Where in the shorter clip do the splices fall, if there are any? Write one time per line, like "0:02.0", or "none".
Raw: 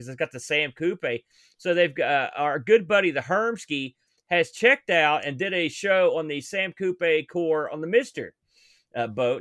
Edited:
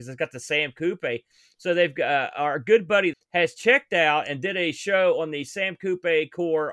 0:03.1